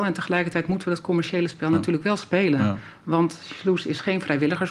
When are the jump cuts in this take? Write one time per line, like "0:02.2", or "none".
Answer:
none

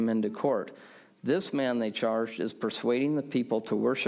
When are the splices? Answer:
none

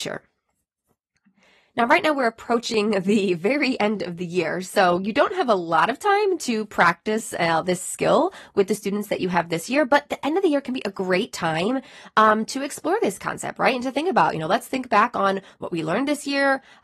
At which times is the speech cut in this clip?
none

